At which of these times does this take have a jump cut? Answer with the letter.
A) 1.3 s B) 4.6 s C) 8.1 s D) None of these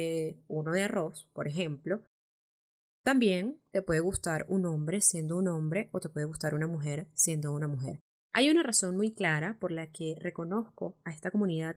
C